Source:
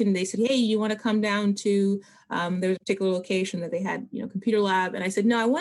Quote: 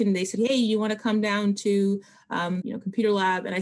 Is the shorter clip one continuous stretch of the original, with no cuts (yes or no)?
no